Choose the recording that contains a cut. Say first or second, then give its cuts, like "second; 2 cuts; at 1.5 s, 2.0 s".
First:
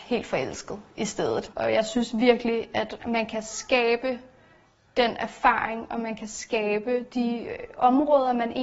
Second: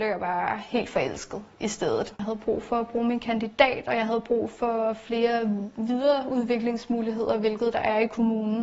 first; 1 cut; at 1.5 s